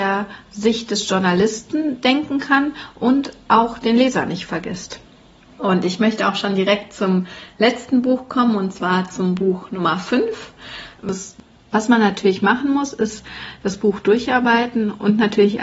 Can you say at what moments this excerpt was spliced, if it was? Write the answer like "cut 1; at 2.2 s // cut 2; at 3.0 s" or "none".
cut 1; at 5.6 s // cut 2; at 11.0 s